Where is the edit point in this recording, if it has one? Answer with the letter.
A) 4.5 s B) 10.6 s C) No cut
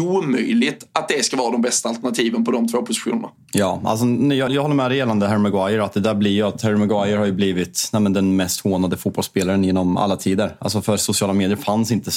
A